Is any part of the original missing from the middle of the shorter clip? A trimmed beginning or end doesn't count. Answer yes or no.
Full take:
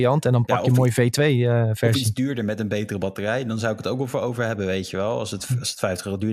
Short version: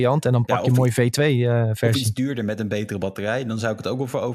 no